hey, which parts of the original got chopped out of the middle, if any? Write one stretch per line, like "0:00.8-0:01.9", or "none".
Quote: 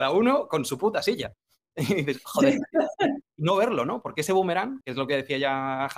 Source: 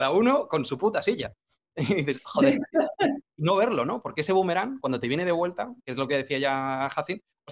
0:04.8-0:05.8